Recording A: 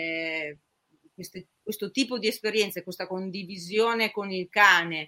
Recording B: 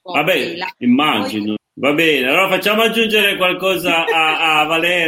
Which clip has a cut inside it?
B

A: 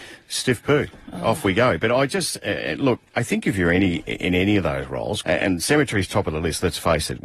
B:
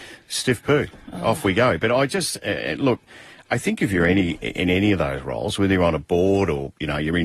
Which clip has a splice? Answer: A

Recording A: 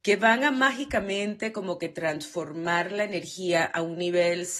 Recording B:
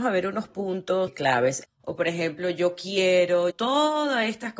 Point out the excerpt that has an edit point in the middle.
B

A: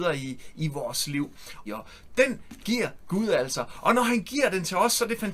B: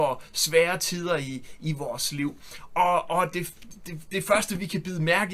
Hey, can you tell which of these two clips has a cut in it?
A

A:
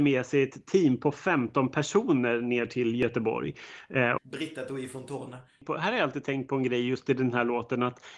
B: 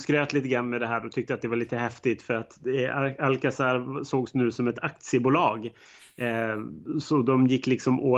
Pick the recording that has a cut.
A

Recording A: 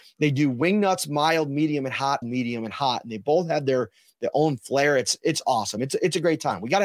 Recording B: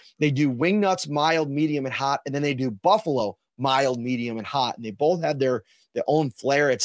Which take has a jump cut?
A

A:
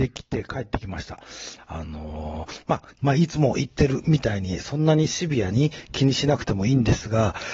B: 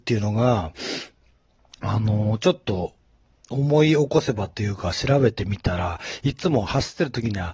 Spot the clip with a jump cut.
A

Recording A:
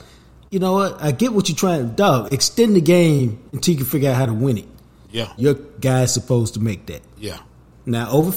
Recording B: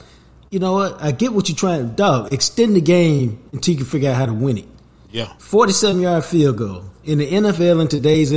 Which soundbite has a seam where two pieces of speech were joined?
A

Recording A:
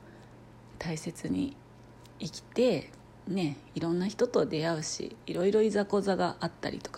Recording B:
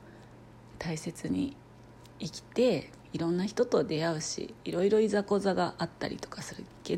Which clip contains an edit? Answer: B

